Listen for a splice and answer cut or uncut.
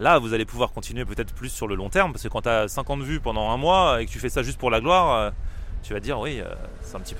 uncut